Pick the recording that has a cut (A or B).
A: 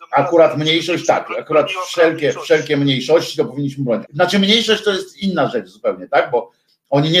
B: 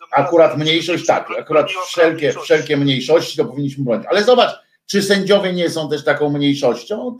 A